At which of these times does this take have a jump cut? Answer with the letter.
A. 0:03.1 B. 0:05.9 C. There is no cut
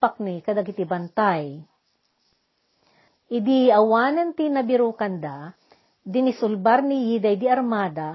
A